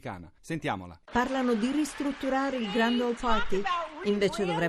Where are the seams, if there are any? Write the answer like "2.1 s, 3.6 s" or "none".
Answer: 1.1 s